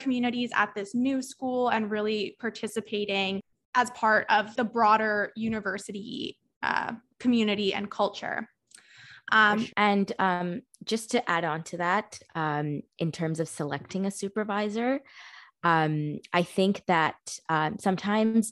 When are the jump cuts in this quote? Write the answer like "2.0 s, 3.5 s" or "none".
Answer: 4.6 s, 9.7 s

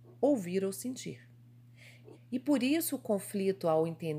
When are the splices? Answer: 2.1 s

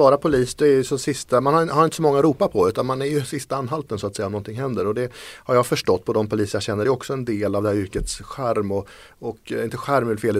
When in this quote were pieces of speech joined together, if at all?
none

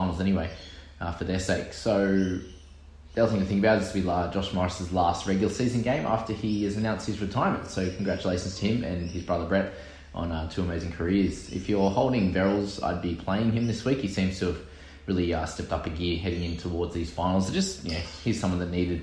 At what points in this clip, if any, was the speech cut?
none

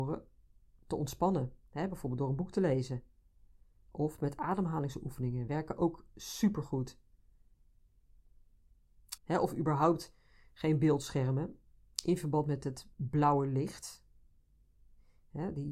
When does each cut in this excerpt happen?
9.2 s, 12.9 s

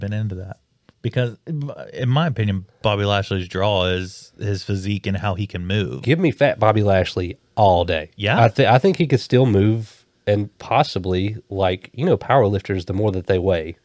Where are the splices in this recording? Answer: none

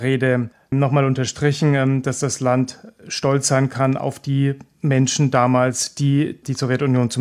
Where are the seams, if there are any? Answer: none

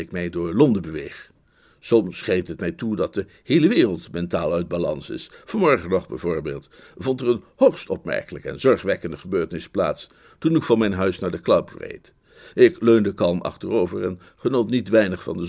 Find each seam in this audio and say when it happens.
12.5 s

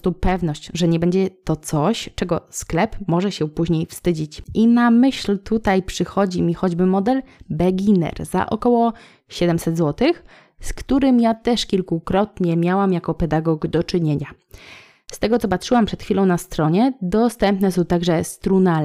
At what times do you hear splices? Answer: none

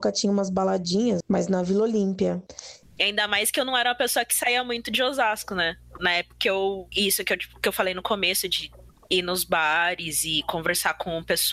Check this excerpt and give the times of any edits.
1.2 s, 2.8 s, 6.9 s

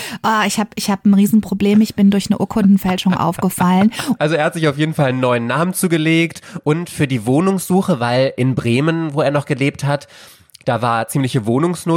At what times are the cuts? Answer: 4.2 s

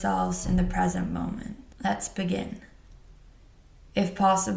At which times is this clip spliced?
1.7 s

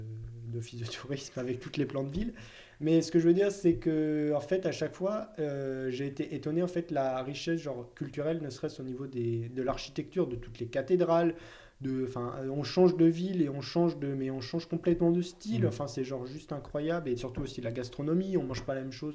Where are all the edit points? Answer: none

